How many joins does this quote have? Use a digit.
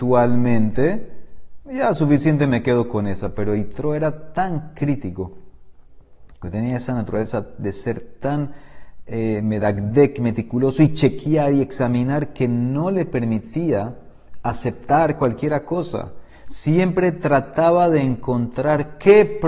0